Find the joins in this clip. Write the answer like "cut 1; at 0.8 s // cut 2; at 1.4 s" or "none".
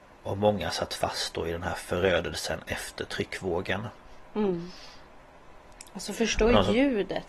none